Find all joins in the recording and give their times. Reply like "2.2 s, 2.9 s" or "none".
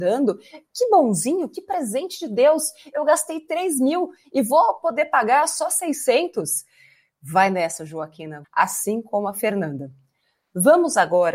8.4 s